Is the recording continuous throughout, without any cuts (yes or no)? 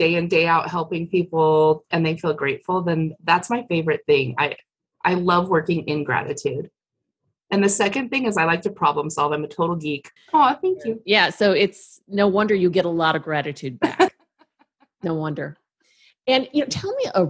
no